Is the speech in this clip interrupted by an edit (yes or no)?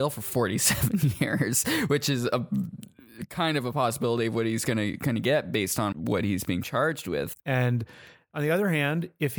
yes